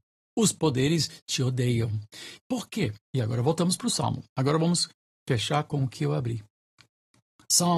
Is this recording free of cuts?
no; 1 cut; at 2.5 s

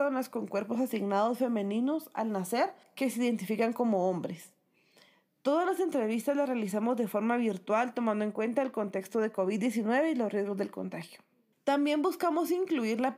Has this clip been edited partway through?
no; 0 cuts

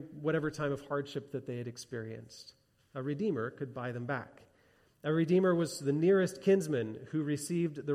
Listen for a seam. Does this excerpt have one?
no; 0 cuts

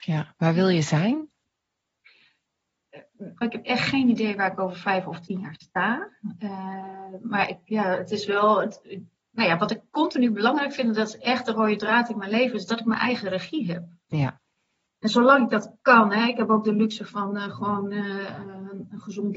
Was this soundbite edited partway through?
yes; 1 cut; at 3.4 s

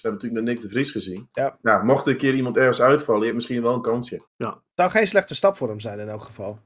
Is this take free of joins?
no; 1 cut; at 4.3 s

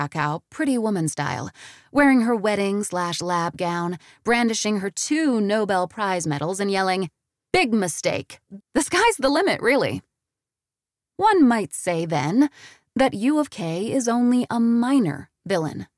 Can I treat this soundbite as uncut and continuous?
no; 1 cut; at 8.6 s

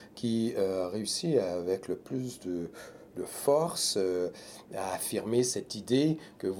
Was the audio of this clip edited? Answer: no; 0 cuts

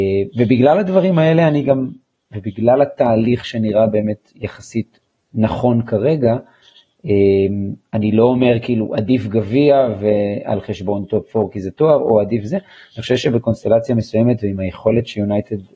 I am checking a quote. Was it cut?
no; 0 cuts

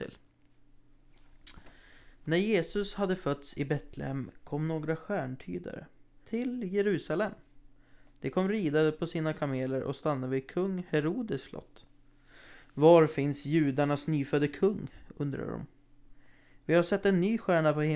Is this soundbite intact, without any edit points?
no; 1 cut; at 6.2 s

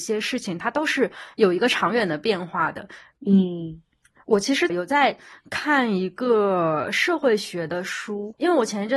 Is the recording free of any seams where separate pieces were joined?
no; 2 cuts; at 3.1 s, 4.7 s

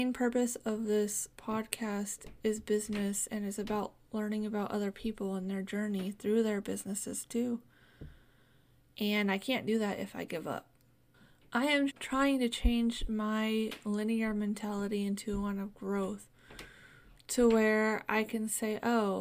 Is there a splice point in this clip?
yes; 1 cut; at 11.9 s

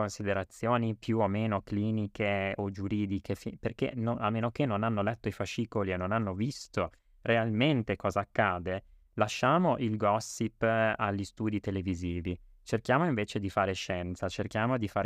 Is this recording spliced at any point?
no; 0 cuts

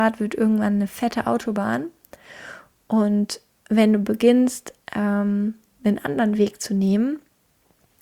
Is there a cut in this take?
no; 0 cuts

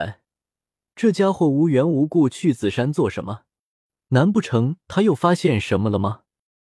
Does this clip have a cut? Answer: no; 0 cuts

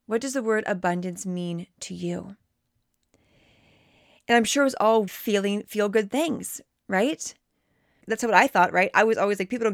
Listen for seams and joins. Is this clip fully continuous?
no; 2 cuts; at 5.1 s, 8.0 s

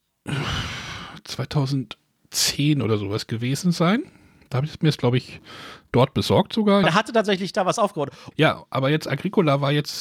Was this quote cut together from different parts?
yes; 2 cuts; at 6.8 s, 8.3 s

